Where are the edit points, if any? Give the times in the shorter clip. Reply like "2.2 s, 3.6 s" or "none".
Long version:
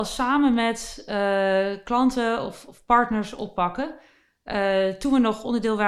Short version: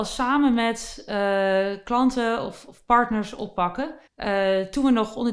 4.1 s

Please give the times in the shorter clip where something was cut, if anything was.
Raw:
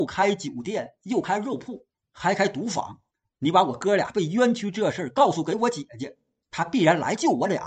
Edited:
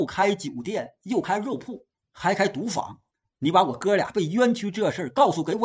none

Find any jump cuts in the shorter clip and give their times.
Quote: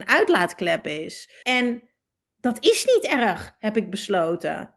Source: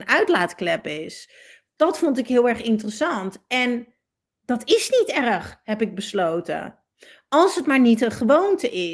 1.4 s

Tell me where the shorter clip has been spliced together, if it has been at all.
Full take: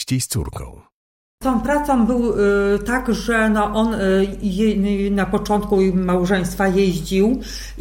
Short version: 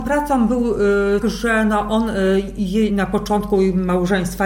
1.2 s, 2.9 s

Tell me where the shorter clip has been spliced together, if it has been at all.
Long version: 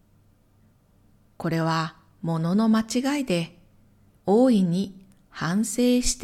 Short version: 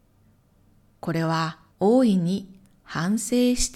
1.7 s

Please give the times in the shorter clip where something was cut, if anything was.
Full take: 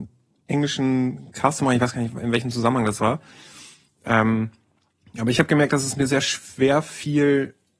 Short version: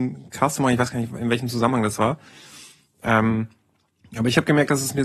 none

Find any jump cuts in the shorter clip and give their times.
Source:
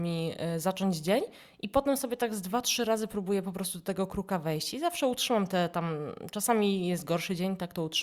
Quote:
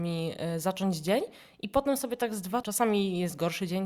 2.6 s

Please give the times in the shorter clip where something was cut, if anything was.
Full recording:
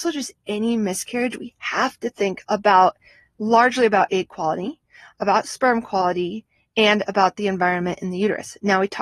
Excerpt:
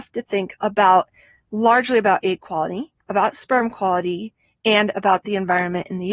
3.0 s

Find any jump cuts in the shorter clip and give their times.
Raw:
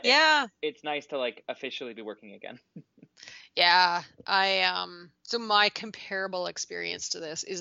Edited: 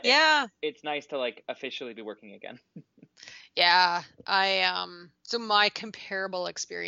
none

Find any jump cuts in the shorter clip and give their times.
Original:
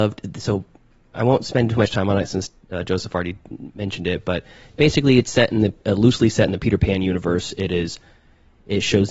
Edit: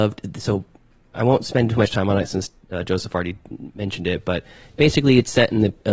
none

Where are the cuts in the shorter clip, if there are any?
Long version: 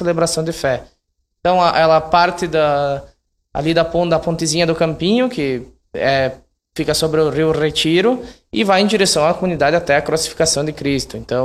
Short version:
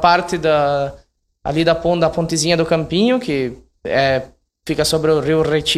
none

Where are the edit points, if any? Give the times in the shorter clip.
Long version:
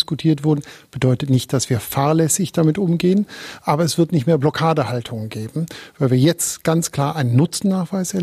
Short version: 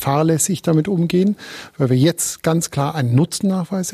1.7 s

